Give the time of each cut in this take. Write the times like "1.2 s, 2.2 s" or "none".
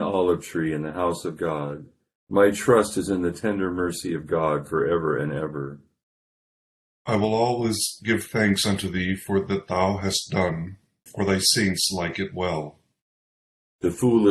11.1 s